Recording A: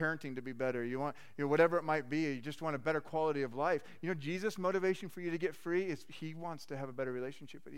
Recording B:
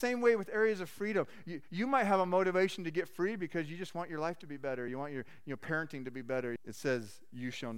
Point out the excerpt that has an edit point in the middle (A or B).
B